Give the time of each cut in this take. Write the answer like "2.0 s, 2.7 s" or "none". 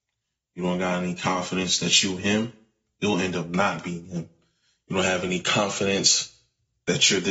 none